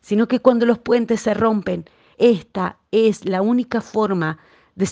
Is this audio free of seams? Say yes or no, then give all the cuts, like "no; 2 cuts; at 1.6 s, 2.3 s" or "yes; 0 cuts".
no; 1 cut; at 2.1 s